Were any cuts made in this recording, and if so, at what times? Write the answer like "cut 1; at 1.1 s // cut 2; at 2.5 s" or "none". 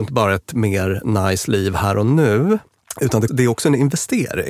cut 1; at 3.3 s